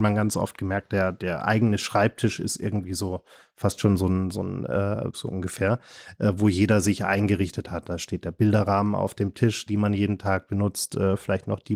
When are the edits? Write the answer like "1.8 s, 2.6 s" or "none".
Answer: 5.1 s, 9.7 s